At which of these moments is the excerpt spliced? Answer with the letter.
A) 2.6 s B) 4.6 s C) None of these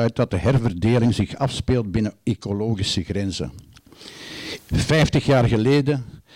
B